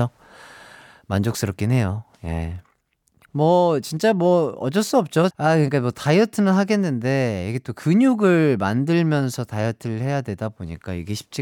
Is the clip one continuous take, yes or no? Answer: no